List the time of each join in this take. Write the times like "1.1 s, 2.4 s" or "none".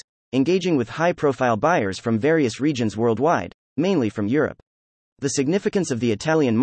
5.1 s